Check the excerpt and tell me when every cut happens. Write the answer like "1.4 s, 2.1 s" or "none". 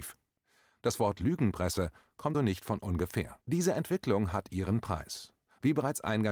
2.3 s, 3.4 s